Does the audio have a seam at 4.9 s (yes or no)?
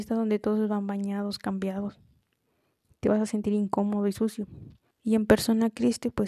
yes